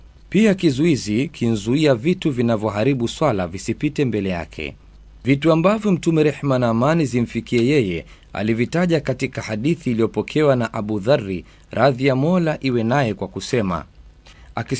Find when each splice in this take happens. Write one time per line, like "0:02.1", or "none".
none